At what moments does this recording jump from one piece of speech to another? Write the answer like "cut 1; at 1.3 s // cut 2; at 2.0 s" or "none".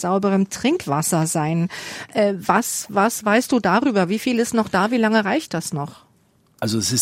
none